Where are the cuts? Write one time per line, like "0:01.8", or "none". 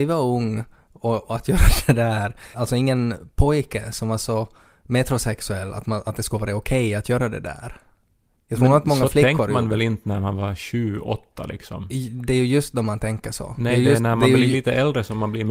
0:02.5